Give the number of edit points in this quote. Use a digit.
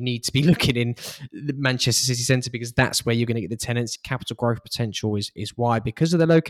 1